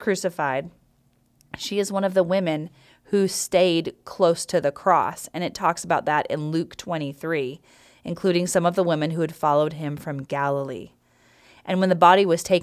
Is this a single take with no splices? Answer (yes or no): yes